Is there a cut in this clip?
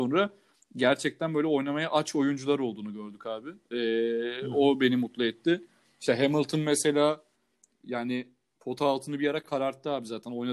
no; 0 cuts

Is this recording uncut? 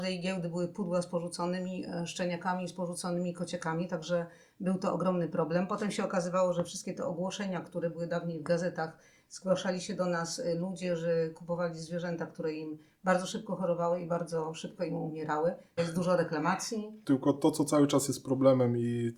no; 2 cuts; at 15.8 s, 17.0 s

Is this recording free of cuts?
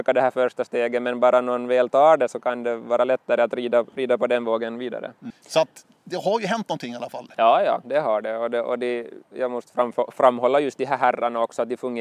no; 1 cut; at 5.3 s

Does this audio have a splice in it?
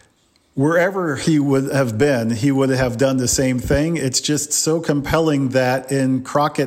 no; 0 cuts

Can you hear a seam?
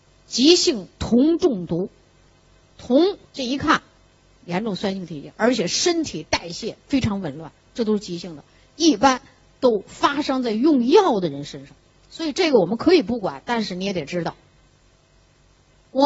yes; 1 cut; at 3.2 s

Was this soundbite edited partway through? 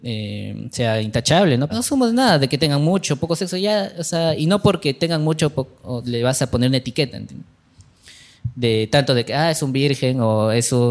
yes; 1 cut; at 1.7 s

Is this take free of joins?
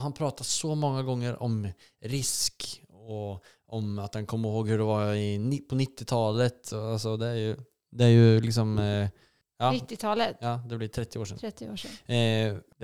yes; 0 cuts

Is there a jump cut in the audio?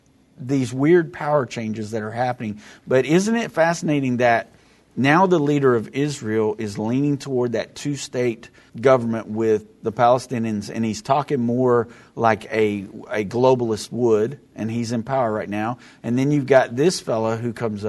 yes; 1 cut; at 8.7 s

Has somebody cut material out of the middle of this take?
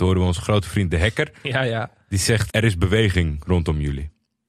yes; 1 cut; at 2.5 s

